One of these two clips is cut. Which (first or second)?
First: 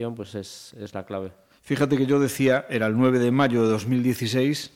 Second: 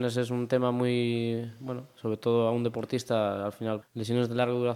second